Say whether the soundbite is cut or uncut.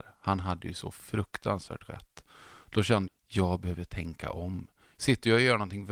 cut